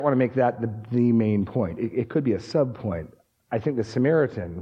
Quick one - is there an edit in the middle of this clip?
no; 0 cuts

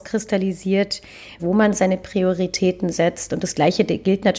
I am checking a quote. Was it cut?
yes; 1 cut; at 1.4 s

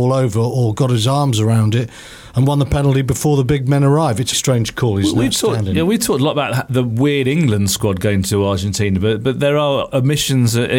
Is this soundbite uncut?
no; 1 cut; at 4.3 s

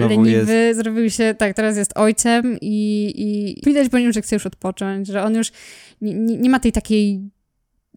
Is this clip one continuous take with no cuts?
no; 1 cut; at 3.6 s

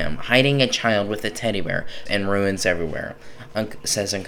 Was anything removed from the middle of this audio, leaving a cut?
yes; 1 cut; at 2.1 s

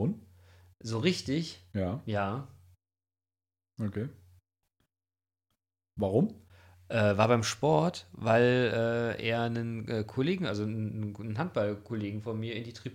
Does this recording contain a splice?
no; 0 cuts

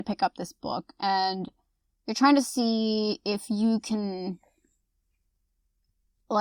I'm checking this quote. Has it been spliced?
no; 0 cuts

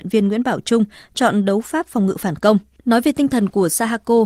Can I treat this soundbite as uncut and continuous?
no; 1 cut; at 2.8 s

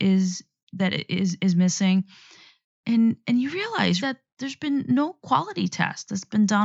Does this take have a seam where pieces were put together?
yes; 1 cut; at 4.0 s

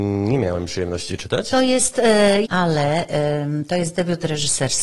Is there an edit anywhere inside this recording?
yes; 1 cut; at 2.5 s

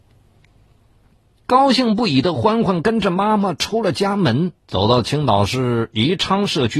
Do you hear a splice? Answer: yes; 1 cut; at 4.6 s

